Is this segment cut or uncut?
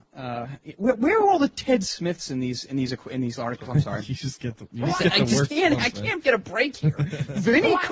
uncut